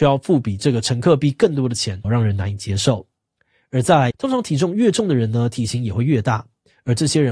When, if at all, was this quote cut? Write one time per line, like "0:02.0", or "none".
0:02.0
0:04.1